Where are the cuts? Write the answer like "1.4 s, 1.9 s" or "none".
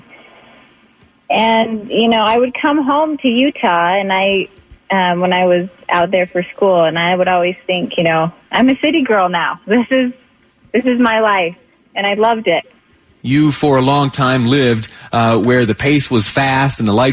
13.2 s